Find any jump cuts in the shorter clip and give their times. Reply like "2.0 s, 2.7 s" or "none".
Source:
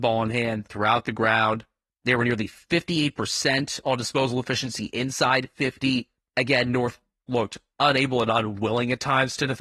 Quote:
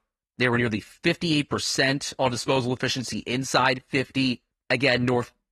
none